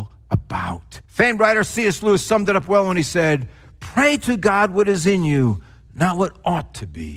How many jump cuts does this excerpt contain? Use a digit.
1